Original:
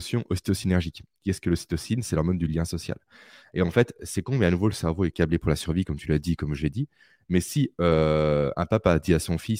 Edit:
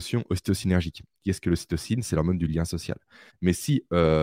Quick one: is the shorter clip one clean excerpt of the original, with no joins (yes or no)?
no